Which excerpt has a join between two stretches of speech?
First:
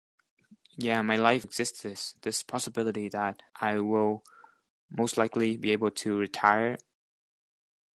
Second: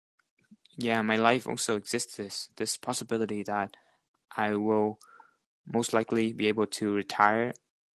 first; 2 cuts; at 1.4 s, 3.5 s

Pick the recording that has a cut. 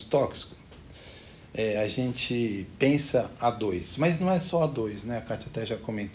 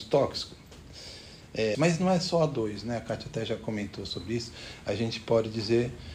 second; 1 cut; at 1.7 s

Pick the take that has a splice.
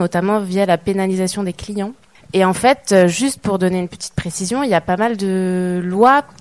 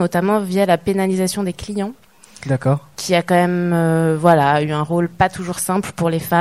first; 1 cut; at 2.1 s

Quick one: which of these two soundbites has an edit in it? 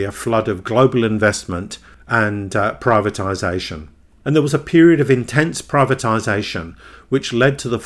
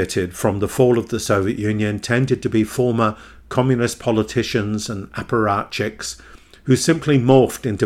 first; 1 cut; at 4.2 s

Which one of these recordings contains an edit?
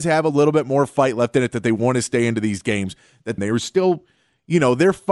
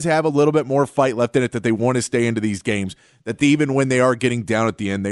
first; 1 cut; at 3.4 s

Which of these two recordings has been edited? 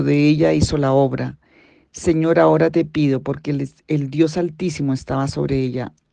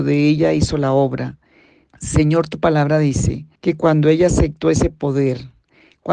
second; 2 cuts; at 1.9 s, 3.5 s

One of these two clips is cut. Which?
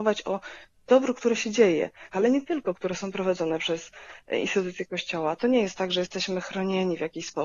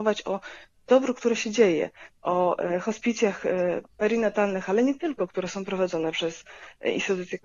first; 2 cuts; at 2.1 s, 5.4 s

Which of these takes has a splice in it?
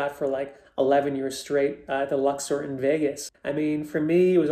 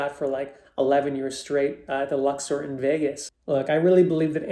first; 1 cut; at 3.3 s

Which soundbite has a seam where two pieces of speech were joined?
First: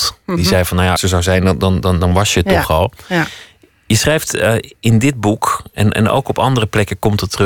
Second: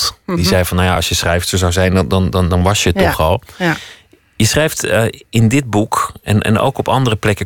first; 1 cut; at 1.0 s

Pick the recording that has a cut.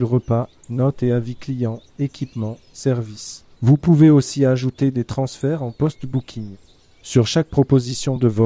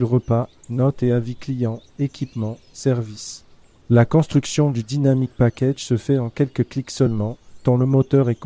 first; 2 cuts; at 3.6 s, 7.0 s

